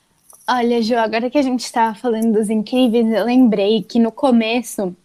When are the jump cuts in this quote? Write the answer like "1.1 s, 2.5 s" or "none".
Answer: none